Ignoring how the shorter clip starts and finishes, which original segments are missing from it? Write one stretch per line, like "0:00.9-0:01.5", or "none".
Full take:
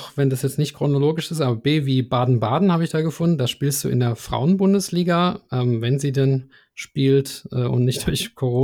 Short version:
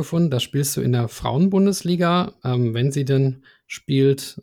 none